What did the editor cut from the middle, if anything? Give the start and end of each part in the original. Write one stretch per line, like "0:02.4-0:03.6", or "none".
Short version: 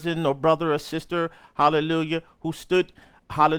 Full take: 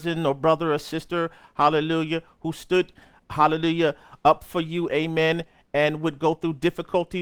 none